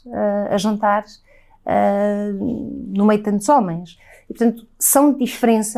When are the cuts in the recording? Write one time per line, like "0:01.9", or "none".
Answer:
none